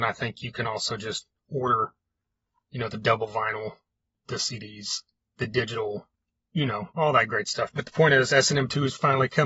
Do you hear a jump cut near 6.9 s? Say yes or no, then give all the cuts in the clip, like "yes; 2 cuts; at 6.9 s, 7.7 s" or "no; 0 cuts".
yes; 1 cut; at 6.9 s